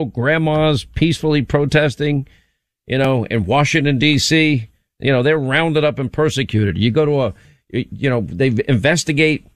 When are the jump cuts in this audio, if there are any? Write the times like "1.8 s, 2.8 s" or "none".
none